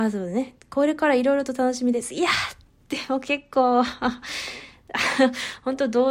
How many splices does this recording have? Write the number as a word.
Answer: zero